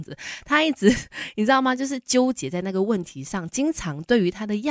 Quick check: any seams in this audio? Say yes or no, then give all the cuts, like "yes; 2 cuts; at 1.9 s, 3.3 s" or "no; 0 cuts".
no; 0 cuts